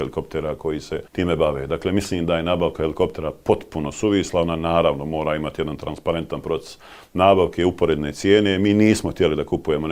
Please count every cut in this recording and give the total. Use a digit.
1